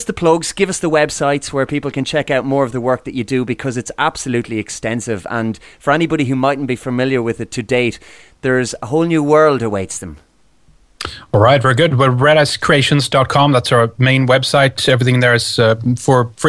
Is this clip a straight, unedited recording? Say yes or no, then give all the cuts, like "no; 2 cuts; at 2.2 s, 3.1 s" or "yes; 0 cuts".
yes; 0 cuts